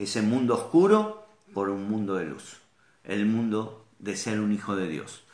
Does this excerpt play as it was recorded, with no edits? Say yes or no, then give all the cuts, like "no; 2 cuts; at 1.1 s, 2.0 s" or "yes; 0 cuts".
yes; 0 cuts